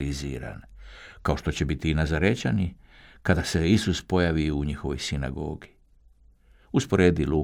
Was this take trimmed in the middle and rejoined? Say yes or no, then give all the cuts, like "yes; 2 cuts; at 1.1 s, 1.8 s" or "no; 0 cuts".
no; 0 cuts